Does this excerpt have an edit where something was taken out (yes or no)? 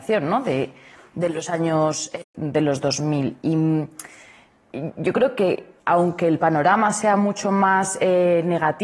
yes